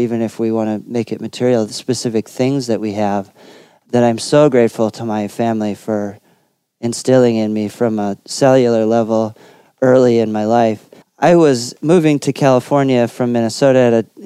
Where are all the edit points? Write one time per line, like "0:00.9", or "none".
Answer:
0:11.0